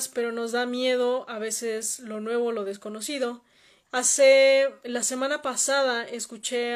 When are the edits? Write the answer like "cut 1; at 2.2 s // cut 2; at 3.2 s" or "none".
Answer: cut 1; at 3.9 s